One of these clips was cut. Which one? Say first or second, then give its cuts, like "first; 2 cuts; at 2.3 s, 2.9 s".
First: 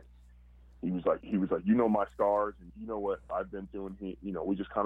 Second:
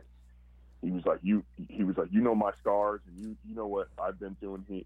first; 2 cuts; at 1.2 s, 2.7 s